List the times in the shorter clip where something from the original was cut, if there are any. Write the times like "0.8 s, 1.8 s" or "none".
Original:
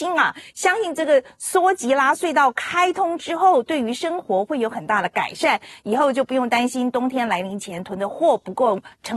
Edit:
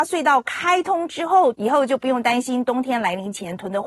1.5 s